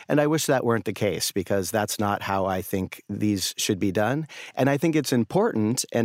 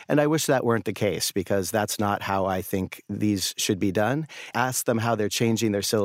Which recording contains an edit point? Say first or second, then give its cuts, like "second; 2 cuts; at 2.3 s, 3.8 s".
second; 1 cut; at 4.5 s